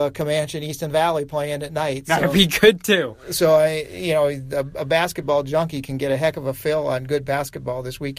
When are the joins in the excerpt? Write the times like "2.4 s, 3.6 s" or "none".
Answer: none